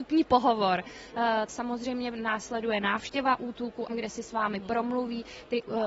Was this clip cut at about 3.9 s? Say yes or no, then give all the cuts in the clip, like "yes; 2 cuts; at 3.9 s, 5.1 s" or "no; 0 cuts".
yes; 2 cuts; at 1.5 s, 3.9 s